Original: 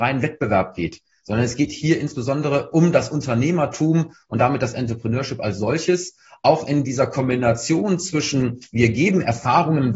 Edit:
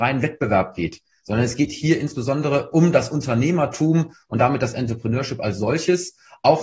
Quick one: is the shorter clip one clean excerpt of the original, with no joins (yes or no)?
yes